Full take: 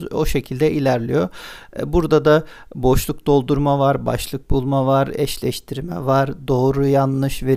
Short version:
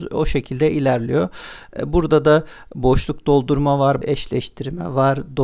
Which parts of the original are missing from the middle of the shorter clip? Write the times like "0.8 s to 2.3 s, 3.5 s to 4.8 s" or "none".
4.0 s to 5.1 s